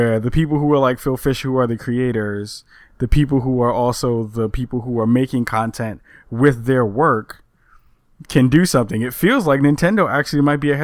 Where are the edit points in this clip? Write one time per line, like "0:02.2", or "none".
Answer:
none